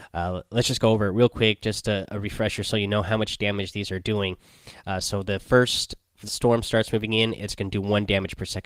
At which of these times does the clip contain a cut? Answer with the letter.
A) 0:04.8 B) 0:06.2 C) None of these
B